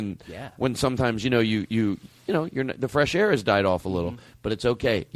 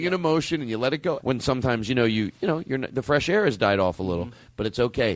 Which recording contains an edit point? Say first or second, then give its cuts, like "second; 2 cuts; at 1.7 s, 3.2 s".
second; 2 cuts; at 1.2 s, 2.3 s